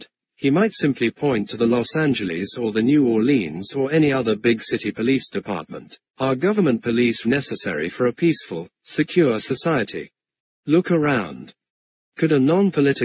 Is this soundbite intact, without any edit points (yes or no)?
no